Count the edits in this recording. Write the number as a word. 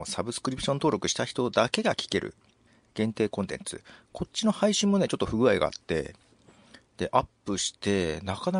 zero